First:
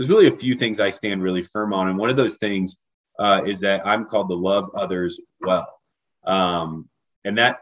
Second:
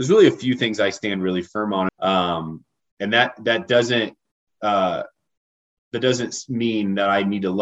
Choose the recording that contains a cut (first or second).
second